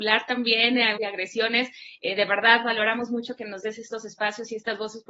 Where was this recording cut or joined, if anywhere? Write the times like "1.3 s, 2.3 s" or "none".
1.0 s